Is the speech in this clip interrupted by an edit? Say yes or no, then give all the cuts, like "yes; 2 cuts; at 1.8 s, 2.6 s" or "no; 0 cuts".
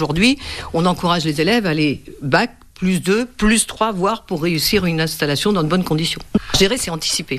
no; 0 cuts